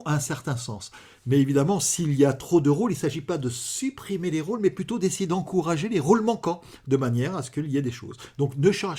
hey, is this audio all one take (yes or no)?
yes